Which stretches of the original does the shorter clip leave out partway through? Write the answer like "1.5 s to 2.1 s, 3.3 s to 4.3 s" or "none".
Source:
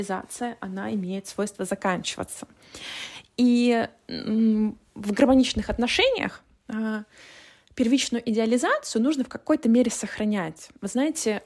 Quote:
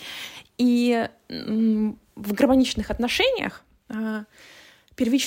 none